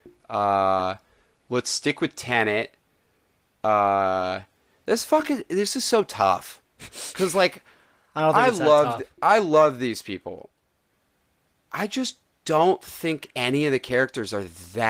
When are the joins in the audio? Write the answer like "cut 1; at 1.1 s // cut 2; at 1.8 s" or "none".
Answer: none